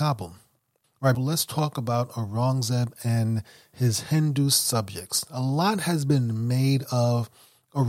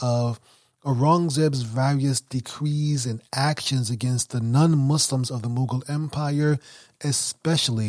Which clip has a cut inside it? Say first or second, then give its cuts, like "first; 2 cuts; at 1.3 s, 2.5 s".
first; 1 cut; at 1.1 s